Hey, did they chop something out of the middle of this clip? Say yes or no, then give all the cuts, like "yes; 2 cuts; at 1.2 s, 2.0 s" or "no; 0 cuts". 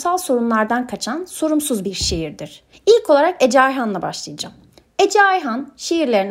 yes; 1 cut; at 2.7 s